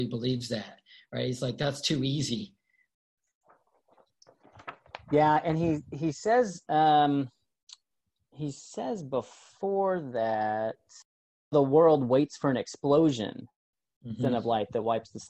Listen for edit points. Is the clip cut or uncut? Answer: uncut